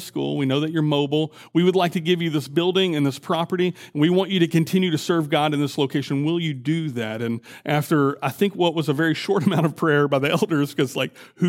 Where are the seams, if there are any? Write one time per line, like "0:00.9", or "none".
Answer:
none